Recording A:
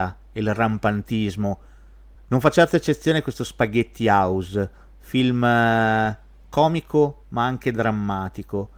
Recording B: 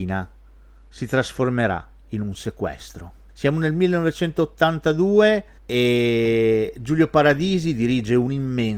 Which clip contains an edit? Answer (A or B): A